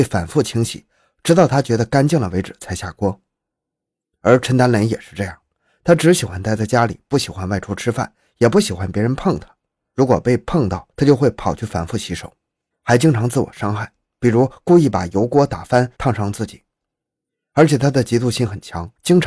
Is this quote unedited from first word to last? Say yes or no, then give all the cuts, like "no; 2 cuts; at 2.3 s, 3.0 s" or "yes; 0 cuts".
no; 1 cut; at 12.7 s